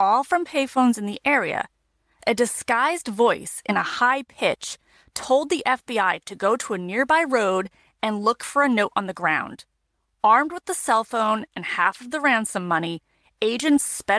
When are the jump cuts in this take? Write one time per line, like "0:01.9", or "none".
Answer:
none